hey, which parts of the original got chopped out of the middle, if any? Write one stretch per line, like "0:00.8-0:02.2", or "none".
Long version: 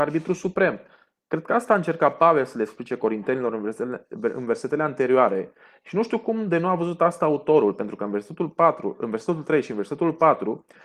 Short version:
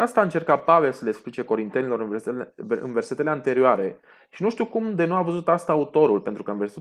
none